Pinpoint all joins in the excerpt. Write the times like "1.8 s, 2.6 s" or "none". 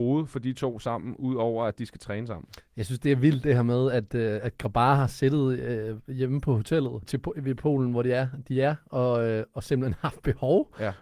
7.0 s